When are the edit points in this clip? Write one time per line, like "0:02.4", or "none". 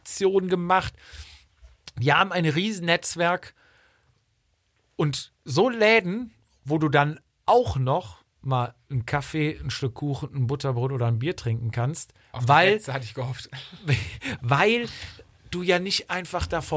none